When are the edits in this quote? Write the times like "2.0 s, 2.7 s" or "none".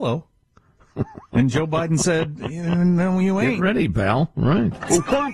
none